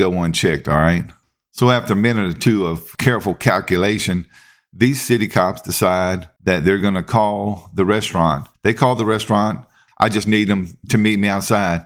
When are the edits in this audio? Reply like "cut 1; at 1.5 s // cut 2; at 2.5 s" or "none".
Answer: cut 1; at 8.5 s // cut 2; at 9.9 s